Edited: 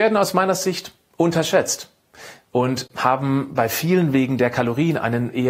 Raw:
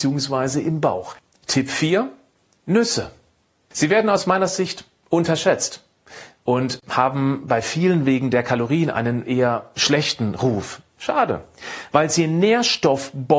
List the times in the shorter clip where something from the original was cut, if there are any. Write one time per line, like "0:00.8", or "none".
none